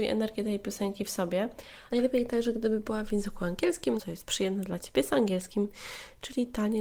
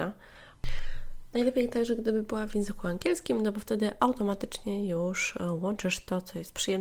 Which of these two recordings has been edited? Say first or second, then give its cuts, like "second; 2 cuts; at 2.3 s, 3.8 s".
first; 2 cuts; at 1.9 s, 4.0 s